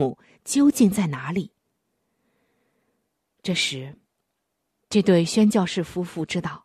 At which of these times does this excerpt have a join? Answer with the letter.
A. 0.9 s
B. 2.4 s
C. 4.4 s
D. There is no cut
D